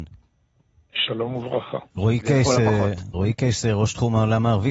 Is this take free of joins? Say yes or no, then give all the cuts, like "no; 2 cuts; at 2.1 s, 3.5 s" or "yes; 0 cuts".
no; 2 cuts; at 1.9 s, 3.1 s